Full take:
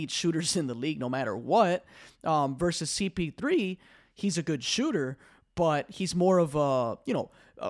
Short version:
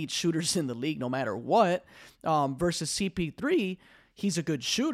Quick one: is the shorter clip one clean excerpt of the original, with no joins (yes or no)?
yes